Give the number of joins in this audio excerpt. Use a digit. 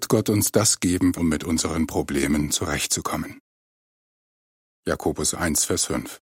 2